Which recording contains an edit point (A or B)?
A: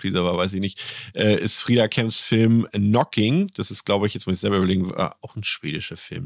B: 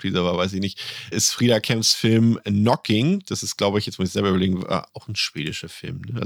B